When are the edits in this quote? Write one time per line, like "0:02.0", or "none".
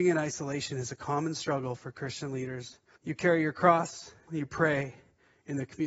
0:03.0
0:04.3